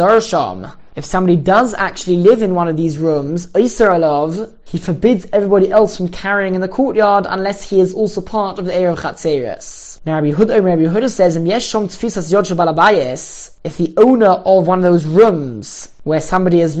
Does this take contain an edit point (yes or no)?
no